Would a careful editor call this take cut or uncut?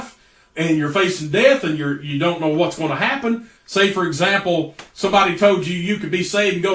cut